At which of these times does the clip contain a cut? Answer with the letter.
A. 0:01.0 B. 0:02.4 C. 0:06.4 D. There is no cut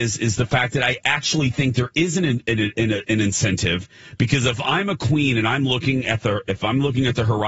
D